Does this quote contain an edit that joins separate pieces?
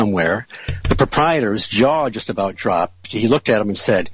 no; 0 cuts

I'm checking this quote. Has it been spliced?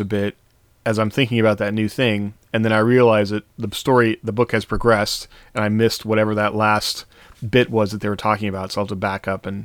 no; 0 cuts

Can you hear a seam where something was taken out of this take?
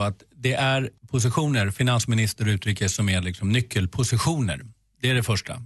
yes; 1 cut; at 1.0 s

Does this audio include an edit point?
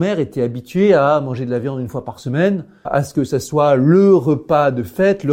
yes; 1 cut; at 2.8 s

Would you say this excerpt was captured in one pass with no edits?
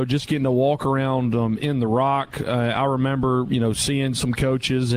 yes; 0 cuts

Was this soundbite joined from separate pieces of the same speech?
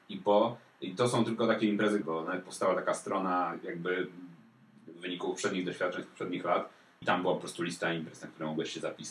yes; 2 cuts; at 2.0 s, 7.0 s

